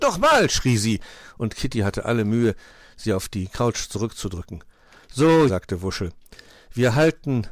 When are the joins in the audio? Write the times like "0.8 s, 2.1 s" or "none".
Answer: 5.5 s